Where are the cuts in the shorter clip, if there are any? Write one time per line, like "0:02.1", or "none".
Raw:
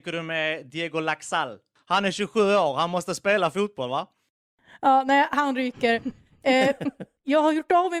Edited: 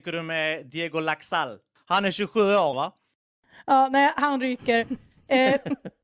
0:02.7